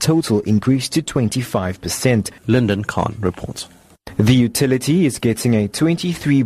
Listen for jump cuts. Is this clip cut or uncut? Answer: cut